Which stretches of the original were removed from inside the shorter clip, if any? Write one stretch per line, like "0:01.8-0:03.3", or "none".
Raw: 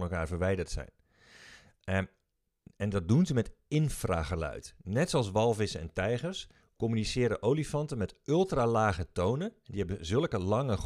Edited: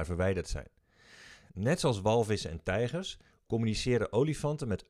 0:01.7-0:04.8